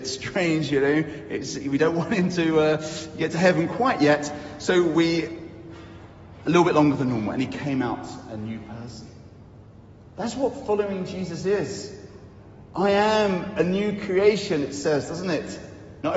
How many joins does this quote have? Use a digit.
0